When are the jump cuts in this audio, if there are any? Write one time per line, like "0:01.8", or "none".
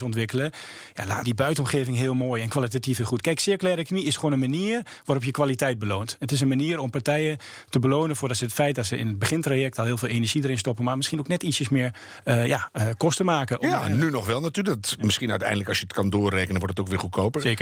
0:01.2